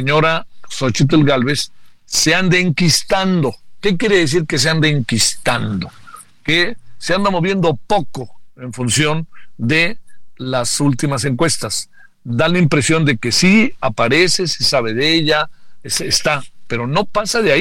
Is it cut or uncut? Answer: uncut